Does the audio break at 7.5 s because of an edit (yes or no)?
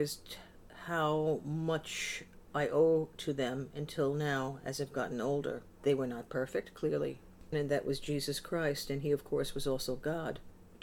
yes